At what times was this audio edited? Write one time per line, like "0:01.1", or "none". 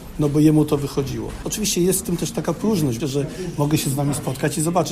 0:01.4
0:03.0